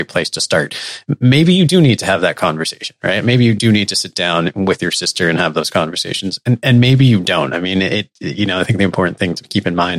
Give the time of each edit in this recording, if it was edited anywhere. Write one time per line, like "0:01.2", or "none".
none